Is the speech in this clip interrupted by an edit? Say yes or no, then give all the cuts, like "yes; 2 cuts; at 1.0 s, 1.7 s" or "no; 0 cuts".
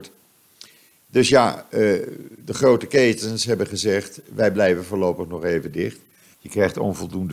yes; 1 cut; at 6.3 s